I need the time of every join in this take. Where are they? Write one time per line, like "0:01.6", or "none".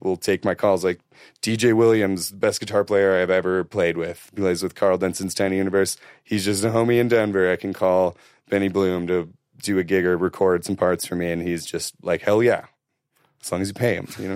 none

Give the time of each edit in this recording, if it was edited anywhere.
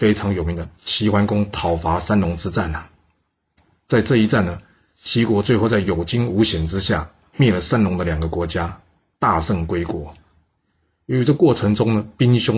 none

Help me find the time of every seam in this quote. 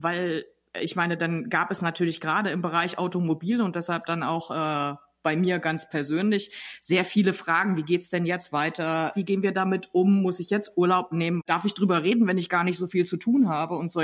0:09.1

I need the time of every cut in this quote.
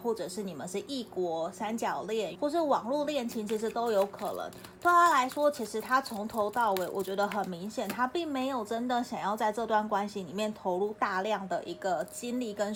0:02.3

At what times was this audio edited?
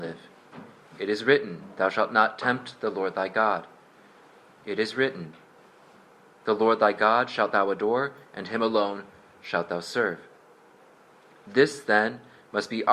none

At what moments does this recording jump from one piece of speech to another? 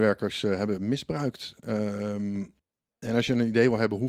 none

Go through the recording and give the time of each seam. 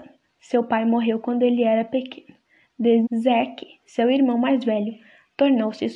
0:03.0

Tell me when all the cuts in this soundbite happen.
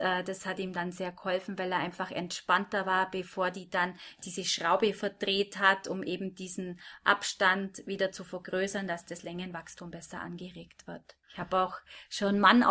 0:11.2

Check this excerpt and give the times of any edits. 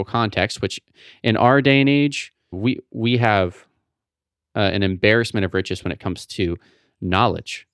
0:02.5

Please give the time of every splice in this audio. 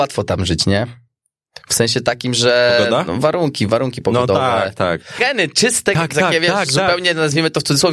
0:05.2

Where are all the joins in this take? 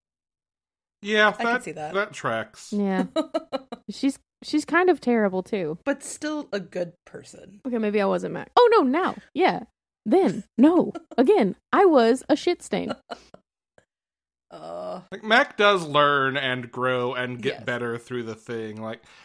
0:08.5

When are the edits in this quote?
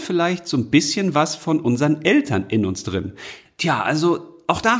0:03.5

